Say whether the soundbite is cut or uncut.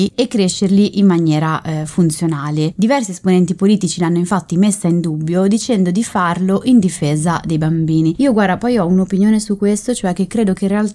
uncut